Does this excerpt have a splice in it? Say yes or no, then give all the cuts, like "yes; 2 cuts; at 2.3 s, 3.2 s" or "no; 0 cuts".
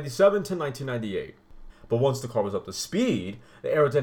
yes; 1 cut; at 1.7 s